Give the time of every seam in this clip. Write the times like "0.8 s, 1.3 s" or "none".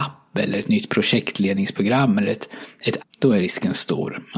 3.0 s